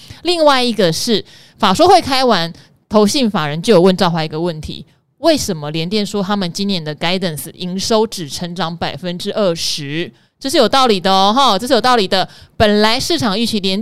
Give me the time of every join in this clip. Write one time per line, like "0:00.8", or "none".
none